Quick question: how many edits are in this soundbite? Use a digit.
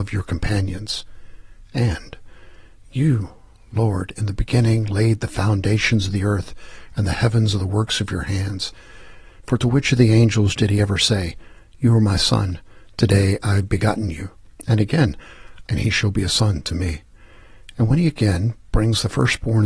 2